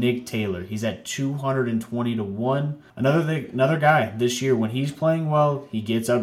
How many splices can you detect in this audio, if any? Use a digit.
1